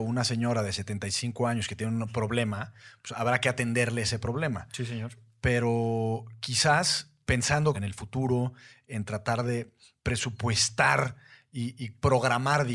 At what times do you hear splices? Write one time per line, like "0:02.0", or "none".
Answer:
0:07.7